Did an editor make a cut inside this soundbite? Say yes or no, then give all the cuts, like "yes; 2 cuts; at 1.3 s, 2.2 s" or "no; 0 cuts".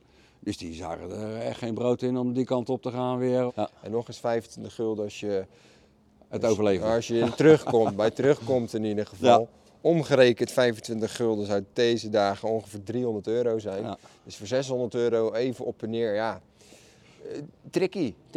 yes; 1 cut; at 3.5 s